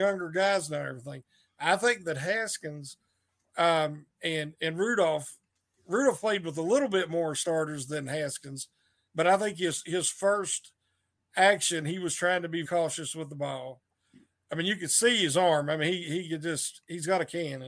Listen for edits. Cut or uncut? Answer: cut